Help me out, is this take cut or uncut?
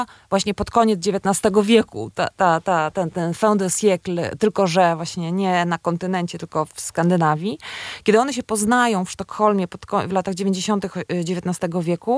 uncut